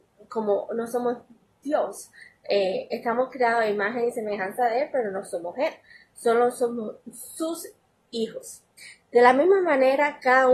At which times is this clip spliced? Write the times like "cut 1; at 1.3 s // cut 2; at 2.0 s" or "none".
cut 1; at 9.0 s